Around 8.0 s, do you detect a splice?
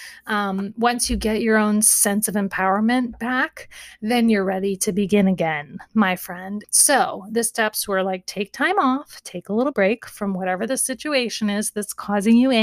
no; 2 cuts; at 6.6 s, 9.7 s

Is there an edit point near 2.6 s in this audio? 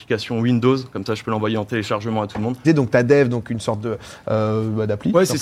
yes; 1 cut; at 2.6 s

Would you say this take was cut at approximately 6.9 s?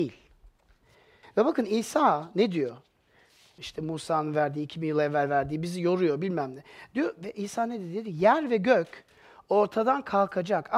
no; 2 cuts; at 1.2 s, 3.6 s

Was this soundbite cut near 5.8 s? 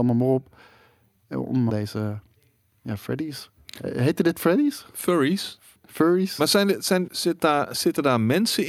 no; 2 cuts; at 1.7 s, 7.1 s

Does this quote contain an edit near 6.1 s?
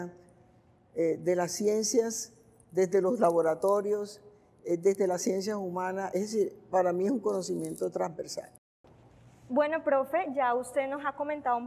no; 0 cuts

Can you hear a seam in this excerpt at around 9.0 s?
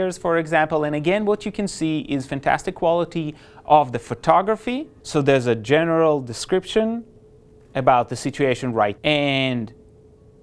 yes; 2 cuts; at 5.0 s, 9.0 s

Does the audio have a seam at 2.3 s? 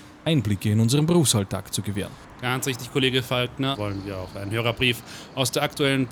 no; 1 cut; at 3.7 s

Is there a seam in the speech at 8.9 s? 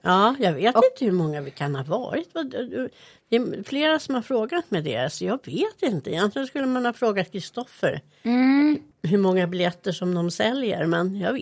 yes; 1 cut; at 8.9 s

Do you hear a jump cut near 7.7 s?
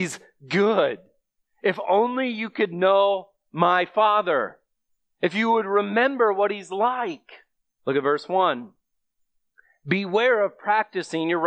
yes; 1 cut; at 7.7 s

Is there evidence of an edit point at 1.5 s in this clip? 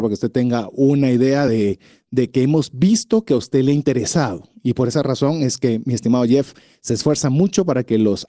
no; 0 cuts

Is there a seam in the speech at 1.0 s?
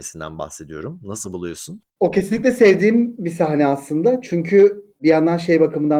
no; 0 cuts

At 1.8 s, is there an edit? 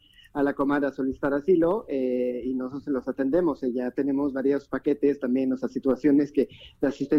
no; 0 cuts

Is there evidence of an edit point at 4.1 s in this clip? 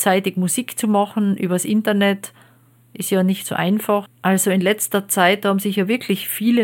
yes; 1 cut; at 4.1 s

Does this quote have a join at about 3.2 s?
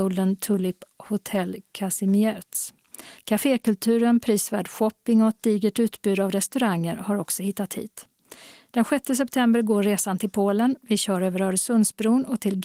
yes; 1 cut; at 3.2 s

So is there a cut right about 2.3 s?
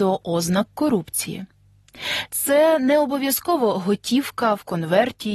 yes; 1 cut; at 2.3 s

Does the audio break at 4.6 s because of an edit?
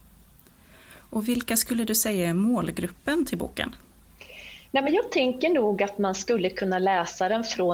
no; 0 cuts

